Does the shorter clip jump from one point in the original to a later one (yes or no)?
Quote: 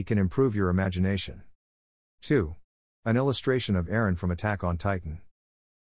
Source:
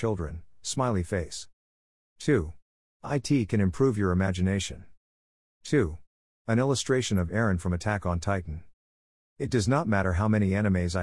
no